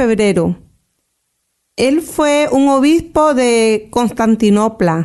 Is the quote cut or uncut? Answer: uncut